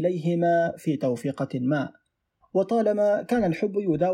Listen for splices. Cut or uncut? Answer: uncut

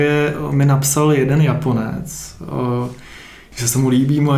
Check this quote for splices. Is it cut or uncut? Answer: uncut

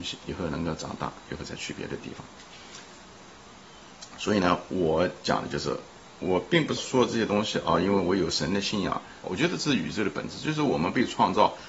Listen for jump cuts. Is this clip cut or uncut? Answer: cut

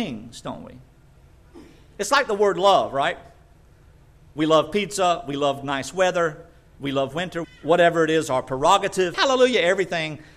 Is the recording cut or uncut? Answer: cut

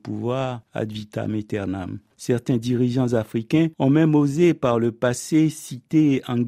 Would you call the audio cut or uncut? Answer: uncut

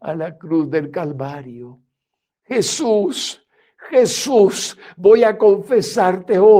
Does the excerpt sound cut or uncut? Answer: cut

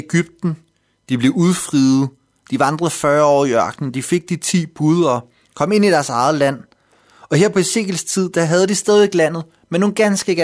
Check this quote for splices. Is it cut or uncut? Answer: uncut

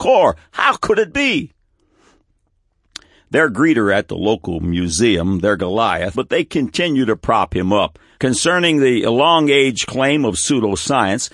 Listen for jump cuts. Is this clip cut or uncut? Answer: cut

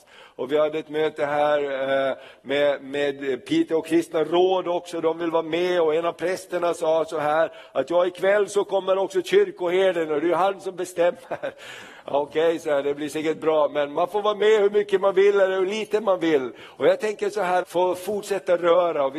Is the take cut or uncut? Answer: cut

